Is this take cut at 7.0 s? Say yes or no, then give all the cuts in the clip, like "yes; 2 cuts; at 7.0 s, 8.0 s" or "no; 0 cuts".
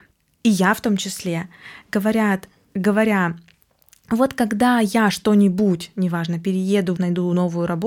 yes; 1 cut; at 7.0 s